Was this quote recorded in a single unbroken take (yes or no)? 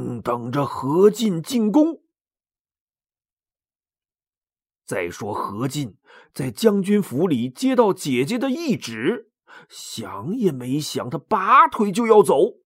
yes